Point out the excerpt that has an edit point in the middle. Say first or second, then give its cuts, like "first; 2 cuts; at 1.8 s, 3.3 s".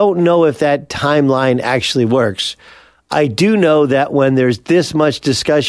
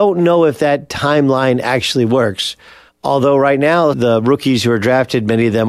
second; 2 cuts; at 2.9 s, 3.9 s